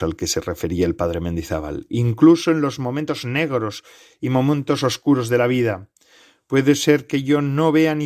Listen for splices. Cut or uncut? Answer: uncut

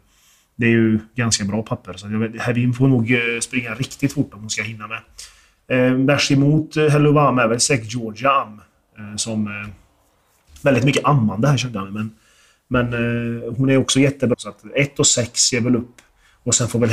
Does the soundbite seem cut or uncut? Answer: cut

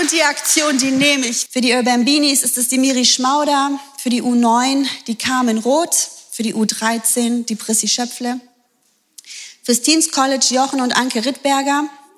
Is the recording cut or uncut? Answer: cut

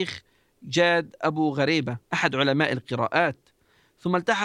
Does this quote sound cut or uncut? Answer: cut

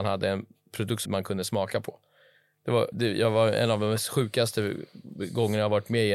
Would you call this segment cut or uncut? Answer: cut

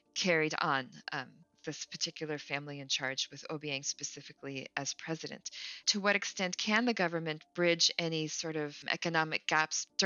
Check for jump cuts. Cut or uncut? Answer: cut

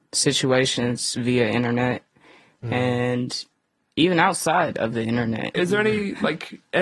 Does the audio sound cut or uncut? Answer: cut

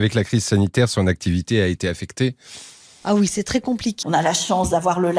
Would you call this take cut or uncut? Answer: cut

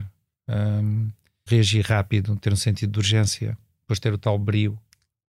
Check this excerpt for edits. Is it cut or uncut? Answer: cut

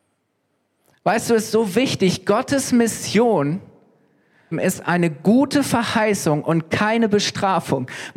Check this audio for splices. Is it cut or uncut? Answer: cut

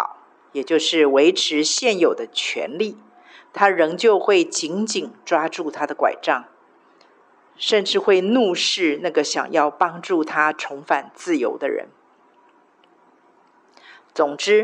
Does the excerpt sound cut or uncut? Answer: uncut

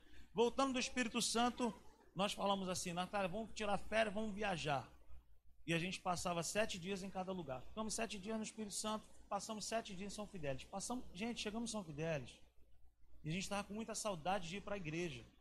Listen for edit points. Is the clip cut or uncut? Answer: uncut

